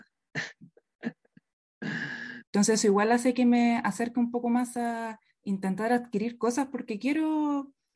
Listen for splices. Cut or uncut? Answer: cut